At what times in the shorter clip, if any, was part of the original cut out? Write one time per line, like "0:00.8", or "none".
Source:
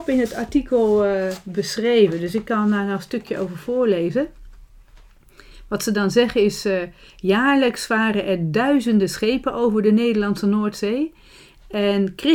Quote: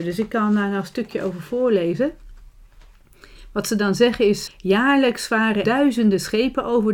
0:04.5
0:05.6